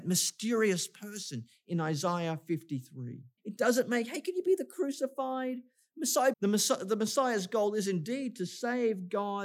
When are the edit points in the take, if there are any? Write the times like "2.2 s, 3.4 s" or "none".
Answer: 3.4 s, 6.3 s